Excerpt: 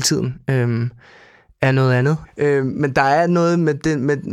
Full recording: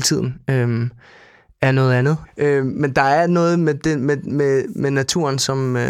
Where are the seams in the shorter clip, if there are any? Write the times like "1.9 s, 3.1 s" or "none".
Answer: none

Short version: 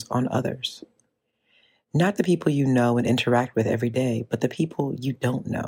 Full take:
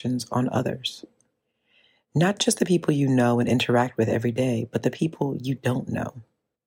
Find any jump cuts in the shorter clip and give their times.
2.2 s

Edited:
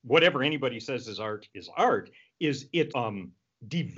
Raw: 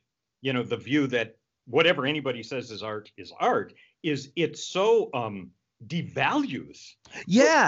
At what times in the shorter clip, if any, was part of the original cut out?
2.9 s

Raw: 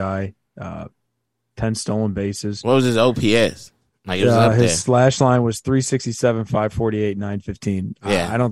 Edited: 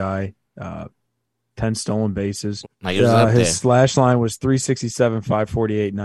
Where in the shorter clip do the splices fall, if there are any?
2.6 s

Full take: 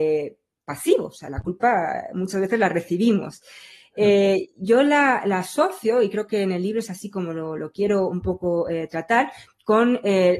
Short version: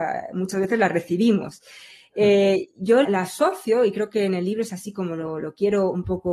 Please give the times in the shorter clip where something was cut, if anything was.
3.0 s

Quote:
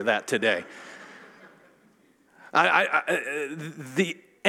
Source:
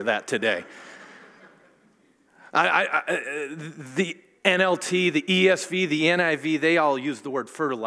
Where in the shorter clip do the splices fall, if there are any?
none

